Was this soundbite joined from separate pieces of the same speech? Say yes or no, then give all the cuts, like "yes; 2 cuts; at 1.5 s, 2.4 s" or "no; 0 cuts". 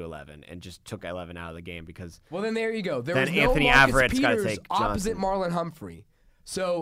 no; 0 cuts